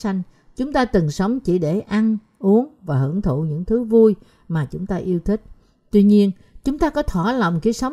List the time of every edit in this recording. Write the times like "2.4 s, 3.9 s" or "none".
none

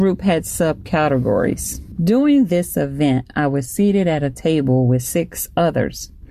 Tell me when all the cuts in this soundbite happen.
2.0 s

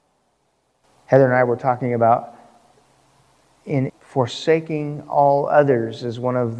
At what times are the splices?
3.9 s

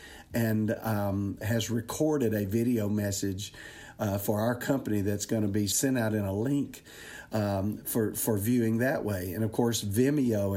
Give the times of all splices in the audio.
1.4 s

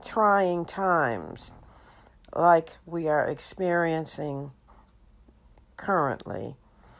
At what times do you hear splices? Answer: none

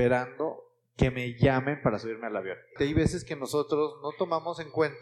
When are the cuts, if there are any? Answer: 2.8 s

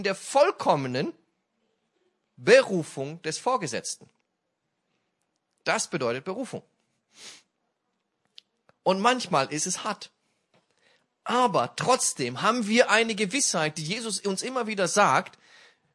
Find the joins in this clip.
none

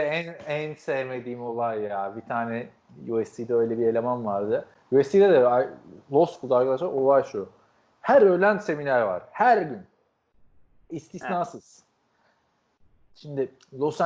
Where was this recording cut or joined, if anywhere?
none

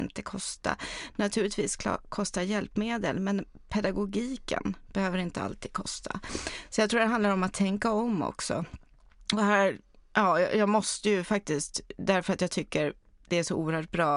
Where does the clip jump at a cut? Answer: none

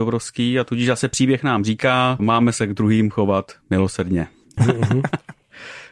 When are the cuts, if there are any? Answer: 2.2 s, 4.6 s

